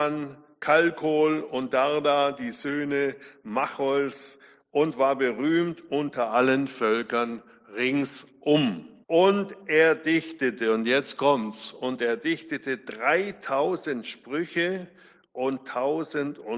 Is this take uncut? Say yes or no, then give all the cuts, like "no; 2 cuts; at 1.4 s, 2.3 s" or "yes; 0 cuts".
no; 1 cut; at 9.0 s